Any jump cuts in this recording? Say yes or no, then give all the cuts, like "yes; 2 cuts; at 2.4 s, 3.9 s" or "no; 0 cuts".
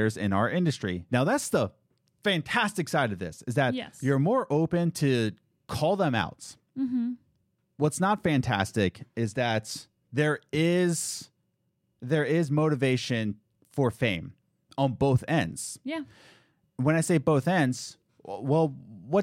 yes; 2 cuts; at 1.1 s, 18.1 s